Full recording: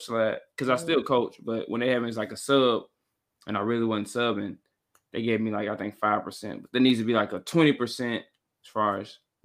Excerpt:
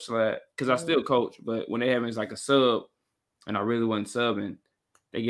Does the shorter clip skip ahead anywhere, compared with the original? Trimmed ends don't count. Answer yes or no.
no